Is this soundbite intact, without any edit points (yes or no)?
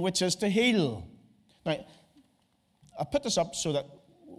no